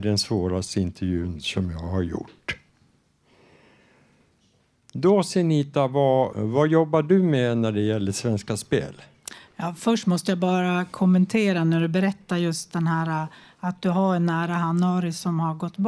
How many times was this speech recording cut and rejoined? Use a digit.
1